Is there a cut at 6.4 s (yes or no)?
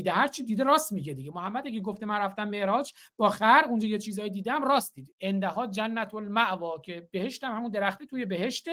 no